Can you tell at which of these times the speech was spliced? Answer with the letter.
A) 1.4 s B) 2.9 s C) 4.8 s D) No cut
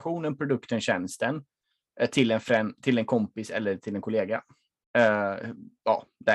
C